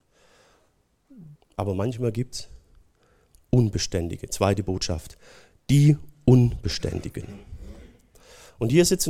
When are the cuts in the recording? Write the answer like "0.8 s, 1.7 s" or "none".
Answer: 1.4 s